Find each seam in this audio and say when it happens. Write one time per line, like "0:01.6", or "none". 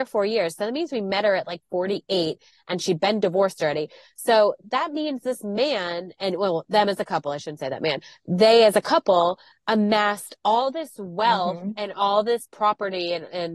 none